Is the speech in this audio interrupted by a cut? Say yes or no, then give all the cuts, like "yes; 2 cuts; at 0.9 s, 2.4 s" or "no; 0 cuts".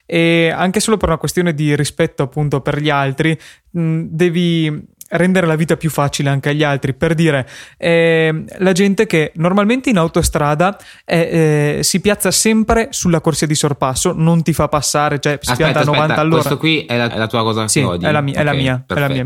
yes; 1 cut; at 17.1 s